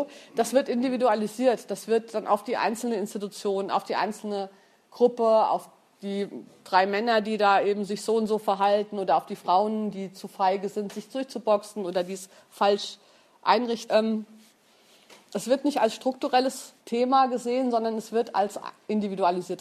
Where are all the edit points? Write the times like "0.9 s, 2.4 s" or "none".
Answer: 13.9 s, 16.8 s